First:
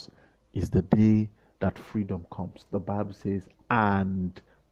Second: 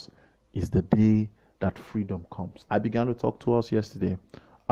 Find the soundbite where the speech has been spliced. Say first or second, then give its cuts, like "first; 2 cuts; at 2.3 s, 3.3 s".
second; 1 cut; at 2.7 s